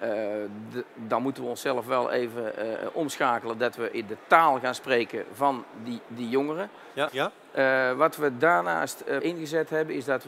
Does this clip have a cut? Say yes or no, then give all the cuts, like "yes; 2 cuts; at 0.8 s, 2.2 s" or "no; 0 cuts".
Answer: yes; 2 cuts; at 7.1 s, 9.2 s